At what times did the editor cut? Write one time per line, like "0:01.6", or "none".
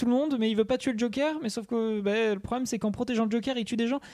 none